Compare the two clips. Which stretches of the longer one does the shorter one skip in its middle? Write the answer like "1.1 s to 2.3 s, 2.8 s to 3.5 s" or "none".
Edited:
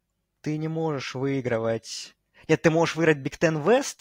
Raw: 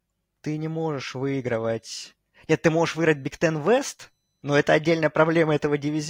none